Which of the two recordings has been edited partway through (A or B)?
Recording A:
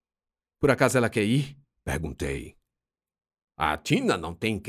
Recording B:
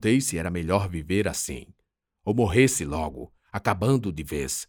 B